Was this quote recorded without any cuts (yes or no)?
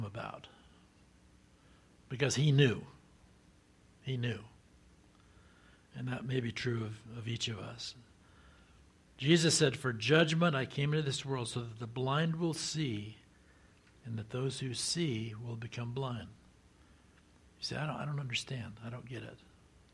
yes